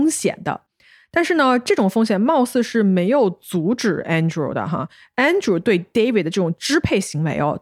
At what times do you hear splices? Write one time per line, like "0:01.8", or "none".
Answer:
none